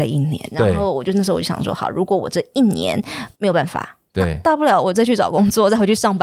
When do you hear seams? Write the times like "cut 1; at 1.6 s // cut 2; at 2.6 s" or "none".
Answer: cut 1; at 3.3 s

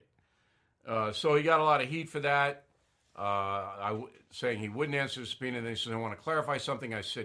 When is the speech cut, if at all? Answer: none

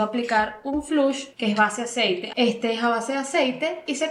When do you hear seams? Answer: cut 1; at 1.3 s // cut 2; at 2.3 s

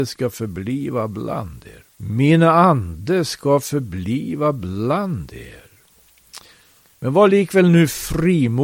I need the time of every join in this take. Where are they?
cut 1; at 1.9 s // cut 2; at 6.9 s

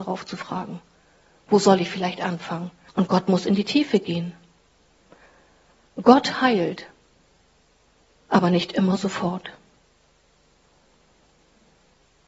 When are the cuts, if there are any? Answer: cut 1; at 2.9 s

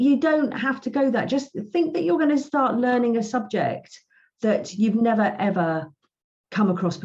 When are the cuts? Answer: none

